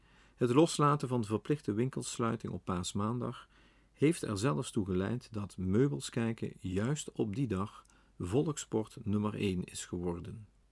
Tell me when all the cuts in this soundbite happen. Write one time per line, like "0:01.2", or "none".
none